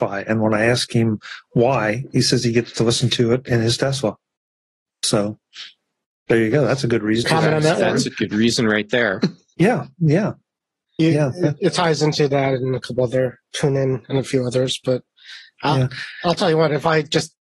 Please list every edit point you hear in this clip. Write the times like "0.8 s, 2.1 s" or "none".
7.2 s

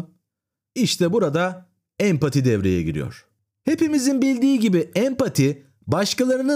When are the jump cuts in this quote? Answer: none

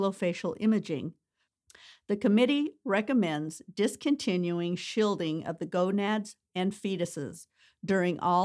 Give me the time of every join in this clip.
6.5 s

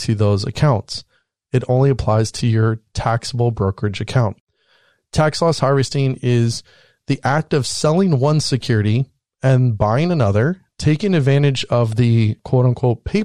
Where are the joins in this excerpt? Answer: none

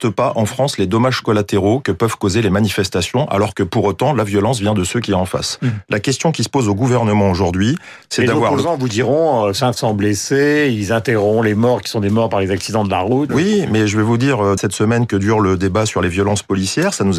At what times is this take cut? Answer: 13.3 s, 14.6 s

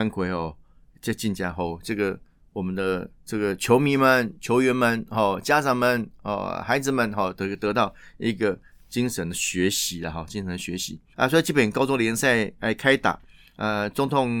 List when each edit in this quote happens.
11.1 s

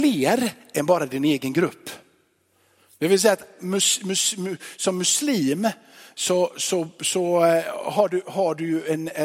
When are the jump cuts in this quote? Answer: none

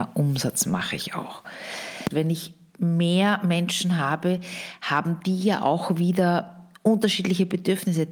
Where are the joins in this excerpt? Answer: 2.1 s

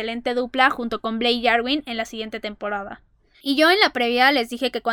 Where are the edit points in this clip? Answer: 3.3 s

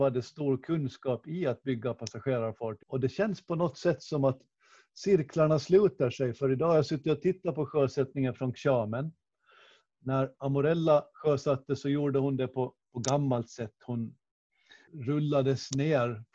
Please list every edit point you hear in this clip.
2.8 s, 14.9 s

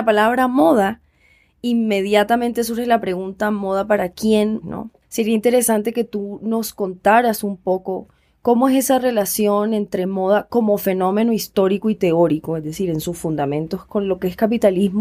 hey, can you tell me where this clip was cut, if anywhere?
4.6 s

